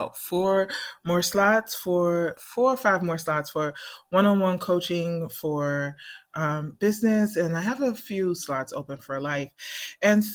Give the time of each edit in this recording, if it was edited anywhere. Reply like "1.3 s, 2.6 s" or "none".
2.4 s